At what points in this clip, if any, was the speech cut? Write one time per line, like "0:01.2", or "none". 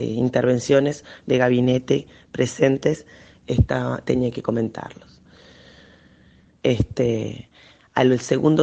0:01.2
0:06.6